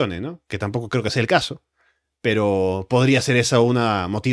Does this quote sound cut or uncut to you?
uncut